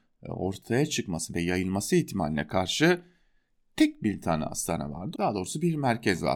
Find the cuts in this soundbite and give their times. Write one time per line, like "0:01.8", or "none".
0:05.1